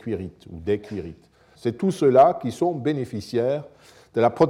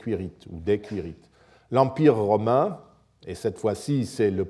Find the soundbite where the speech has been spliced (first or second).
first